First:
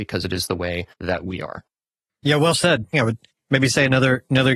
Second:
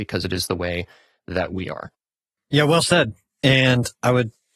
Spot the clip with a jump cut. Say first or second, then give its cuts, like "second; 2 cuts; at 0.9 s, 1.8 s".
first; 2 cuts; at 0.9 s, 2.9 s